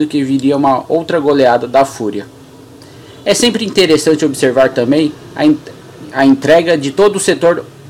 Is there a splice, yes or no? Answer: no